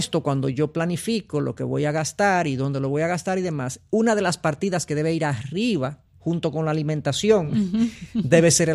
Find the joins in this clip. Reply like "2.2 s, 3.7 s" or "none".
none